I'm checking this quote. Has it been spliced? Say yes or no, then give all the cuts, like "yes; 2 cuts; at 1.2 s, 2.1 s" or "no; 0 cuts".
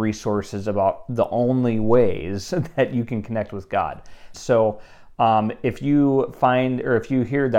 yes; 1 cut; at 4.3 s